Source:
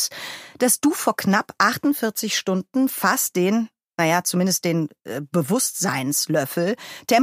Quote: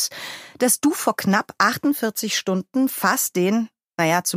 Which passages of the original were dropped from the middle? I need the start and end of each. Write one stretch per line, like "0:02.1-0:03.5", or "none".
none